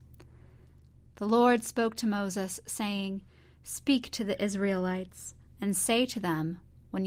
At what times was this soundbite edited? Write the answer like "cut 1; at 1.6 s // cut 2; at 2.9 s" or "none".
none